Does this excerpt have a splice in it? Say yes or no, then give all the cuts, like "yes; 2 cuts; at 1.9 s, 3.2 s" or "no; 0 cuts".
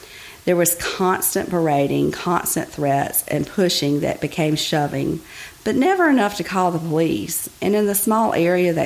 no; 0 cuts